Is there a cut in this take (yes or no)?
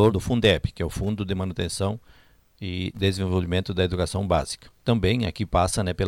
no